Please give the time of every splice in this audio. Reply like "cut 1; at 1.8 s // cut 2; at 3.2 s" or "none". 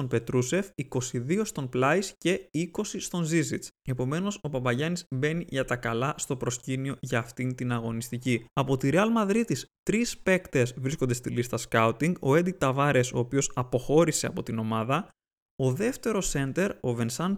none